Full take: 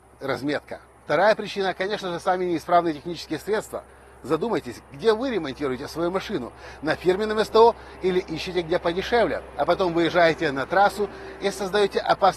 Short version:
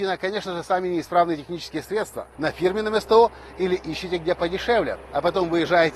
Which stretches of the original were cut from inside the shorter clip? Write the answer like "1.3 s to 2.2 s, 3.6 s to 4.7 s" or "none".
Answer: 3.9 s to 6.8 s